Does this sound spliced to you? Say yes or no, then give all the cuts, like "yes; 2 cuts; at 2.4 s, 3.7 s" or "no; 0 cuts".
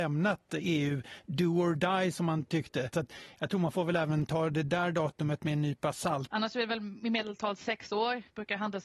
yes; 2 cuts; at 2.9 s, 6.3 s